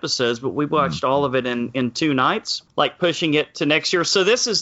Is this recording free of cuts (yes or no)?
no